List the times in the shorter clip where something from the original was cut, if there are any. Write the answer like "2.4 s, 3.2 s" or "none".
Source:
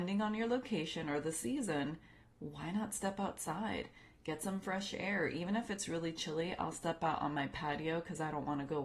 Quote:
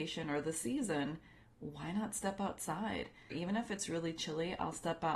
3.3 s